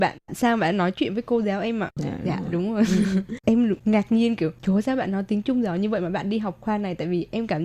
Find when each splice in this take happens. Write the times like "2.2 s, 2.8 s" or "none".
2.0 s, 3.4 s